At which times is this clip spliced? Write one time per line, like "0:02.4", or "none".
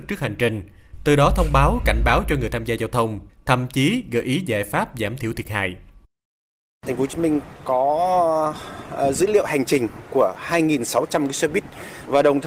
0:03.3